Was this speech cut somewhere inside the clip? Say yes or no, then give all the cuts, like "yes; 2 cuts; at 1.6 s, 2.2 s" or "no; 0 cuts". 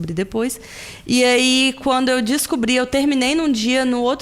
no; 0 cuts